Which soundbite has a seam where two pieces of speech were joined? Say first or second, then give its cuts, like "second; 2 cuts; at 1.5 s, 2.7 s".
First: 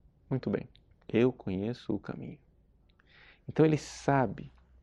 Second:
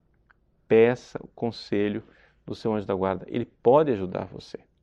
first; 1 cut; at 1.0 s